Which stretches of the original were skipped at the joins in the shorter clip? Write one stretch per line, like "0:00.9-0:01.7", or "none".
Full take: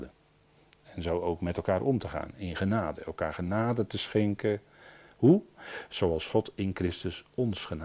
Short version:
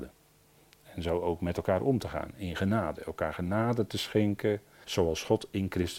0:04.8-0:05.9